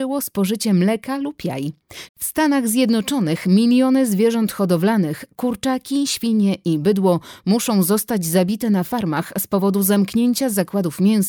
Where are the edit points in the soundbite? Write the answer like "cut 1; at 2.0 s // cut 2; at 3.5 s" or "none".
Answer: cut 1; at 2.1 s